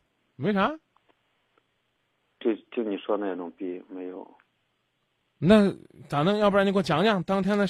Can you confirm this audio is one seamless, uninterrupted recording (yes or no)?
yes